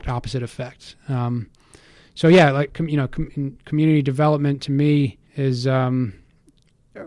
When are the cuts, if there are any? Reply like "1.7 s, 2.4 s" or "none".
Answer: 2.7 s, 5.3 s